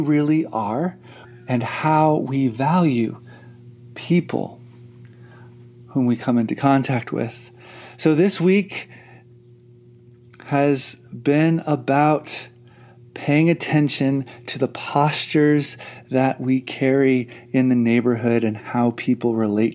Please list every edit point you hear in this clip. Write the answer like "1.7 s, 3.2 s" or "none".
1.2 s